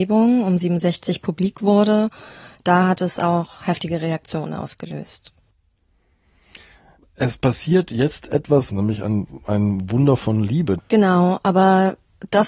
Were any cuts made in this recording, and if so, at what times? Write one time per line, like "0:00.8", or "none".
0:08.7
0:10.8